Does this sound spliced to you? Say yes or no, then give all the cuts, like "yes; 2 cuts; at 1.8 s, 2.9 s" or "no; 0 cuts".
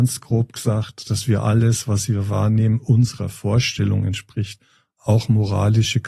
no; 0 cuts